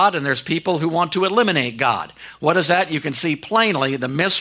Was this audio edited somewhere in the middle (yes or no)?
no